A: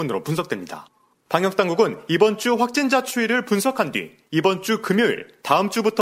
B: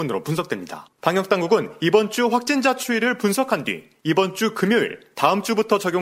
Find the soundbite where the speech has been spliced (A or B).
B